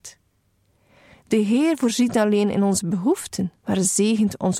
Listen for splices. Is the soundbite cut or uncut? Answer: cut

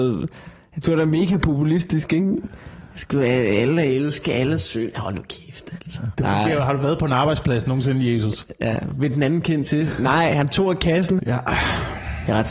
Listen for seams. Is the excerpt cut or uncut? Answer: cut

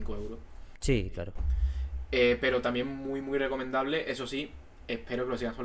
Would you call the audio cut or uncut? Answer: uncut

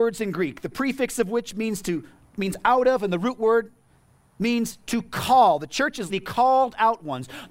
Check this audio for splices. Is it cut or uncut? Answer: cut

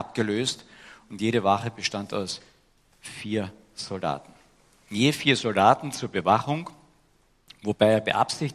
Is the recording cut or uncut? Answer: uncut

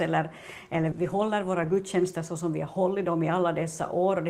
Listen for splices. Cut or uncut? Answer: cut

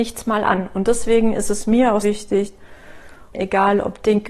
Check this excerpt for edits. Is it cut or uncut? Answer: cut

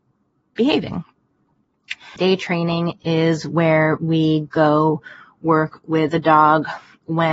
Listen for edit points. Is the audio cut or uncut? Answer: cut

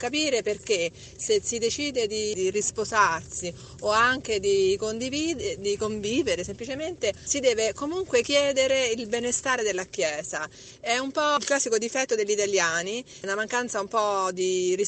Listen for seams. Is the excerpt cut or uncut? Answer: cut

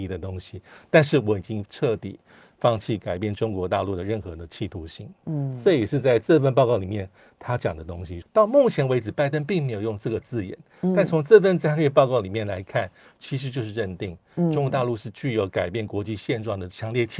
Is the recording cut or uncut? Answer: cut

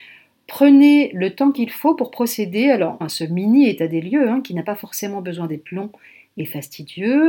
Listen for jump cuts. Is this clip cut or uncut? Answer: cut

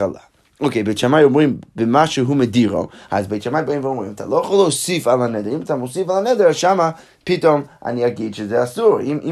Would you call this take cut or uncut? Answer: uncut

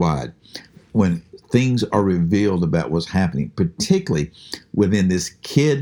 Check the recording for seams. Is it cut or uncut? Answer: uncut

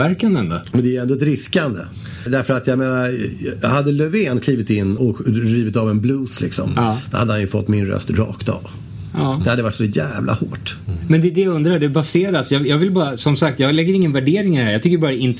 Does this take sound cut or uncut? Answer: cut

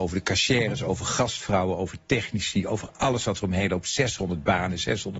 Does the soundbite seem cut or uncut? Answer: uncut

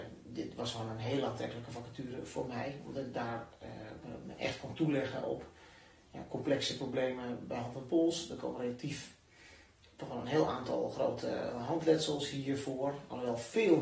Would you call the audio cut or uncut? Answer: uncut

